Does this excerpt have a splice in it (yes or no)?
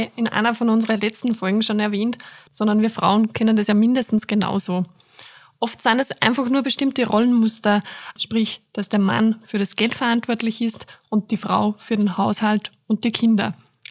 yes